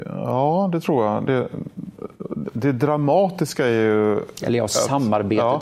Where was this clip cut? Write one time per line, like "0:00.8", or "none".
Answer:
none